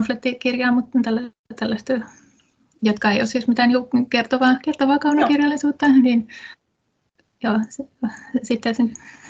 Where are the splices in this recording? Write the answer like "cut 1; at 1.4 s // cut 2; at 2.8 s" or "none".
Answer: none